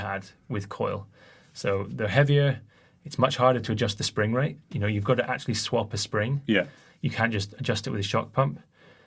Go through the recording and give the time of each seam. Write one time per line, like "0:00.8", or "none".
none